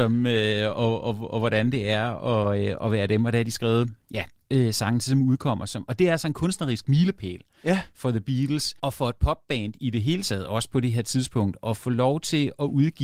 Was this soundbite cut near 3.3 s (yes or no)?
no